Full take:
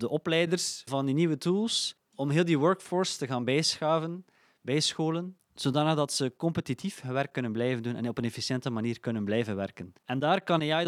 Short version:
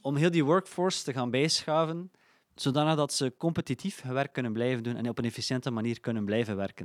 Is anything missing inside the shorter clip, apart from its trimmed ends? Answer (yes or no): yes